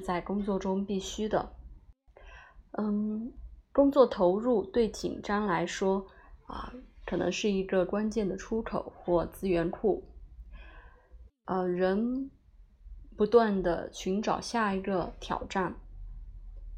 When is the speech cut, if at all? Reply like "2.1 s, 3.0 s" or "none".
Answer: 2.7 s